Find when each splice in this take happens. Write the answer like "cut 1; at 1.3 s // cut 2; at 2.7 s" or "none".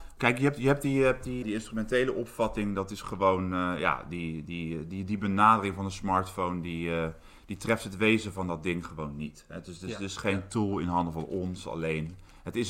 cut 1; at 1.4 s